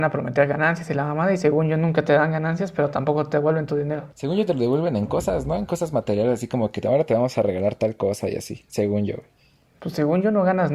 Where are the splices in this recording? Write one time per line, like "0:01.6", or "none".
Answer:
0:04.1

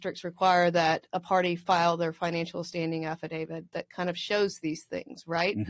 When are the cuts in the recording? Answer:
0:01.1

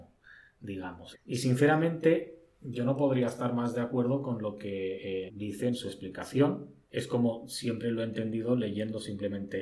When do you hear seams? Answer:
0:01.1
0:05.3
0:06.8

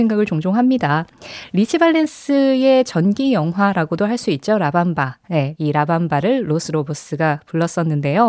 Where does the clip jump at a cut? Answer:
0:05.6

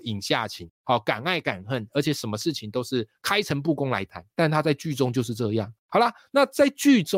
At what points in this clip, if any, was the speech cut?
0:04.3

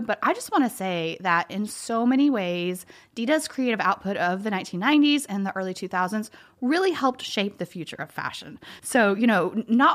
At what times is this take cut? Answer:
none

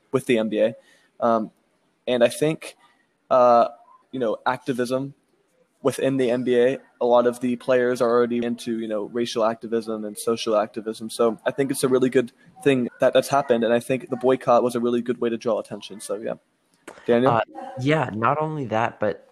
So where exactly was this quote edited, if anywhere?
0:04.0
0:08.4
0:12.9

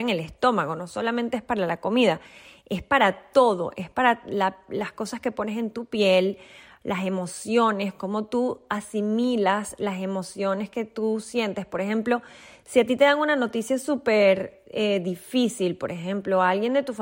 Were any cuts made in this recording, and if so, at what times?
none

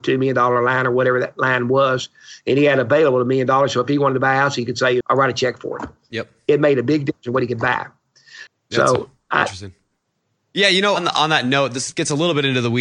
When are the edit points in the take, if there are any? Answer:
0:05.0
0:08.5

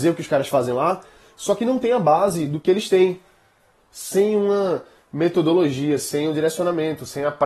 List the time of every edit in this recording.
0:03.7

